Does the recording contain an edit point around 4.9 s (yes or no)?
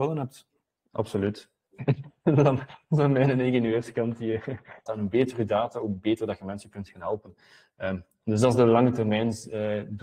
yes